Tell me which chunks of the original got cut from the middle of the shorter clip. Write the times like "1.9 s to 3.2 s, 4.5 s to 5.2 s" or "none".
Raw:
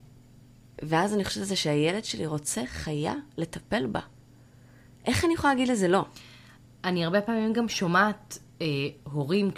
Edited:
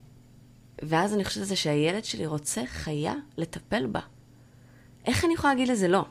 none